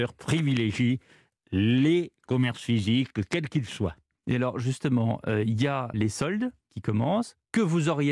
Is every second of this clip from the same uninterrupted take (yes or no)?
no